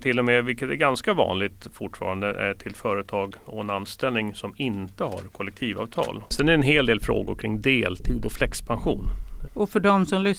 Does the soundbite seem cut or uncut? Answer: cut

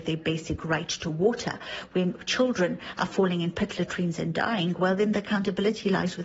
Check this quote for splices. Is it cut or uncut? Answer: uncut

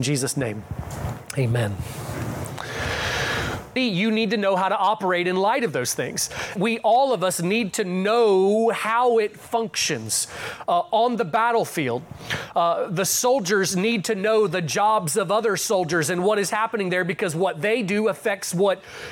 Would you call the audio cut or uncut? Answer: cut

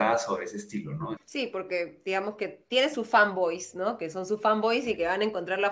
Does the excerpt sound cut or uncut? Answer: cut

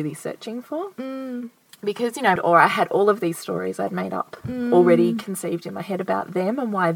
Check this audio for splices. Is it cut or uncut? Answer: cut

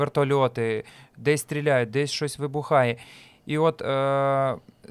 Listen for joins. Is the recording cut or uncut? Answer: uncut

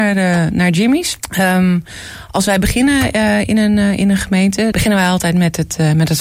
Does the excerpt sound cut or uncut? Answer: cut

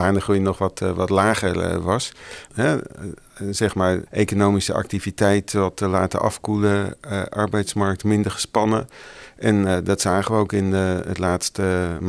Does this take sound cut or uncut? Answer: cut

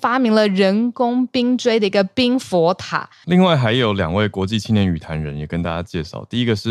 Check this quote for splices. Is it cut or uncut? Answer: cut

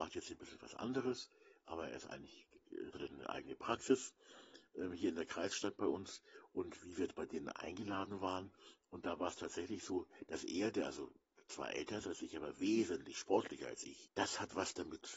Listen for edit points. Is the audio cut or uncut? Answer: cut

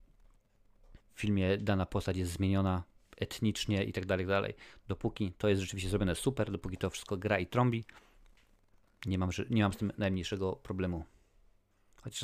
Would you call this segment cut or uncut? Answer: cut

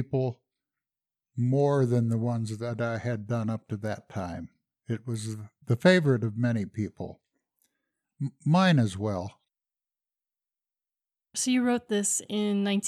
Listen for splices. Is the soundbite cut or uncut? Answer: uncut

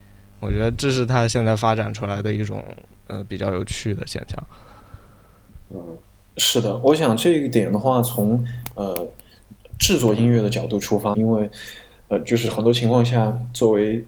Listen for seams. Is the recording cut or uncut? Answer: cut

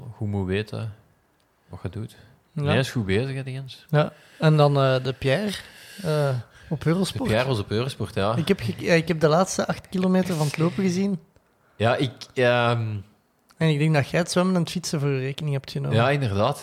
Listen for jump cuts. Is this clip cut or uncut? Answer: cut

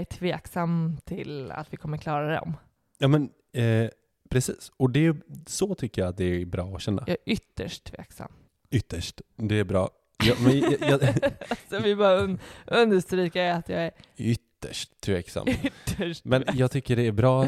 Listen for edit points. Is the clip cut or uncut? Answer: uncut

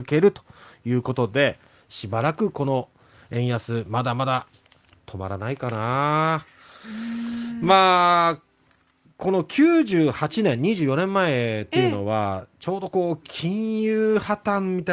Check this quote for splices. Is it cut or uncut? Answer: uncut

